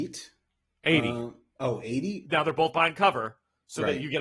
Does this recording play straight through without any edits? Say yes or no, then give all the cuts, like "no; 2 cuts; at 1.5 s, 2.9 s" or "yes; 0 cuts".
no; 1 cut; at 2.2 s